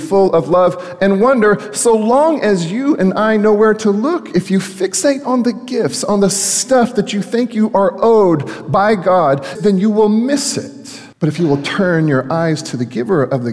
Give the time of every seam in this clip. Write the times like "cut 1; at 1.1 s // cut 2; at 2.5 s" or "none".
cut 1; at 9.6 s // cut 2; at 11.1 s